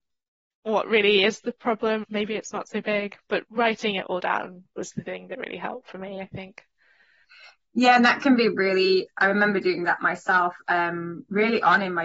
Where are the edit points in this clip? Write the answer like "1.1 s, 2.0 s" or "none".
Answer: 2.0 s